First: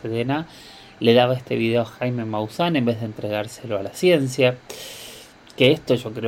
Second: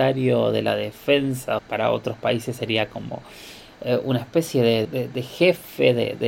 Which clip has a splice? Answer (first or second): second